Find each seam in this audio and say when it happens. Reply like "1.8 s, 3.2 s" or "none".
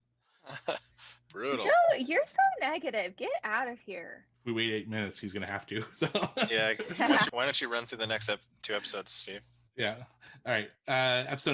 4.3 s, 7.3 s